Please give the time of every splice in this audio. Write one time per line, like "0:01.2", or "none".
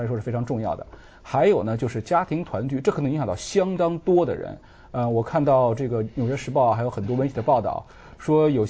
none